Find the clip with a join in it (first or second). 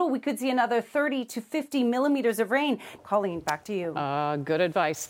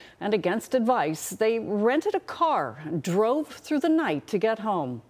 first